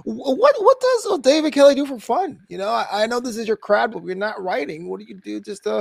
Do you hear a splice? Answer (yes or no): yes